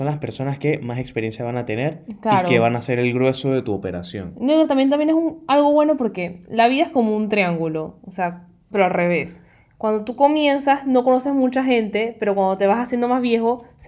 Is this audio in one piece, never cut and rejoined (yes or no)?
no